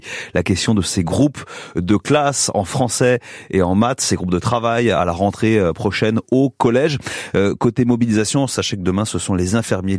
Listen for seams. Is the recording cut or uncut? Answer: uncut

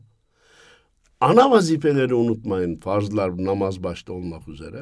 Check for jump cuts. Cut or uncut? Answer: uncut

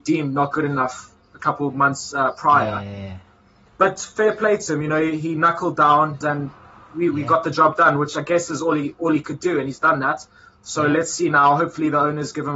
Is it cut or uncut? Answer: cut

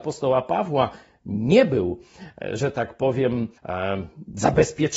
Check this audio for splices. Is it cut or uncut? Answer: cut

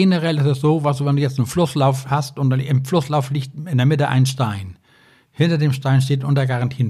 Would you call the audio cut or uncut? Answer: uncut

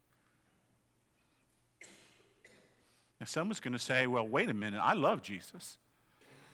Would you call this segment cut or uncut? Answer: uncut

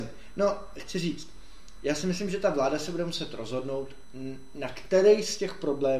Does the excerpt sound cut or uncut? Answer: uncut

